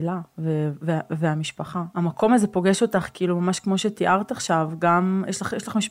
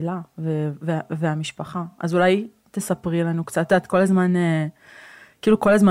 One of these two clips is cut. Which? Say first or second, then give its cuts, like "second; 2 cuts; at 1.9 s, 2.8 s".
first; 1 cut; at 1.9 s